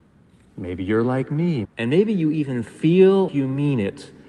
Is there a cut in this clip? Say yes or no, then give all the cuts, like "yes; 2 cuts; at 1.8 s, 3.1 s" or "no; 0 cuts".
yes; 2 cuts; at 1.6 s, 3.3 s